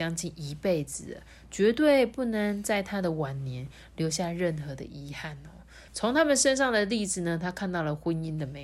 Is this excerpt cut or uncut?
cut